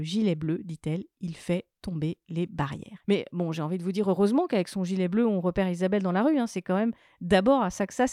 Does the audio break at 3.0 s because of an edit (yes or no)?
yes